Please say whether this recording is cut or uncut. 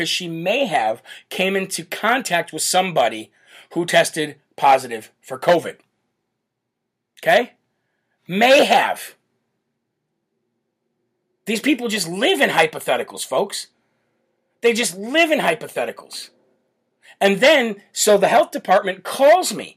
uncut